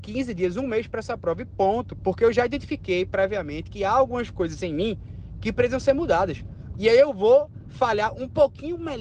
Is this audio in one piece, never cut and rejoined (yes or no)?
no